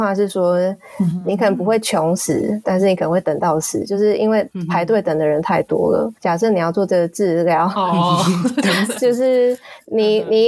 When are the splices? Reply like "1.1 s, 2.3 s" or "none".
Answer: none